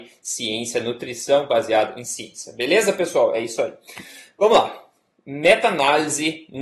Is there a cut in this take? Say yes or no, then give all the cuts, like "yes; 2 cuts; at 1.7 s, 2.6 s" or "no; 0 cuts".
no; 0 cuts